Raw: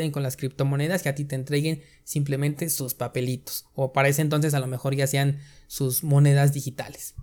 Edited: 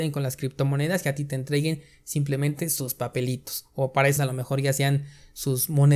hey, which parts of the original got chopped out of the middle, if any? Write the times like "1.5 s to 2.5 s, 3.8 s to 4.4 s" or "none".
4.2 s to 4.5 s